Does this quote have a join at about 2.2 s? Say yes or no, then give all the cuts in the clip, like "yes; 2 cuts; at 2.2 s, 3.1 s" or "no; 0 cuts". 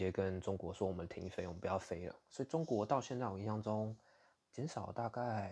no; 1 cut; at 4.4 s